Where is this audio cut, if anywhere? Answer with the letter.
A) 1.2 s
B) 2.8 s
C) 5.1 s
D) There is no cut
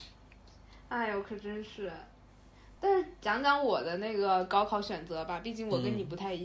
D